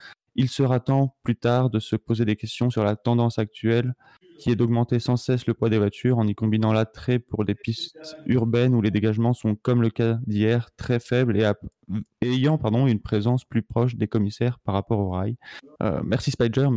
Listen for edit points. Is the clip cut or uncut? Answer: cut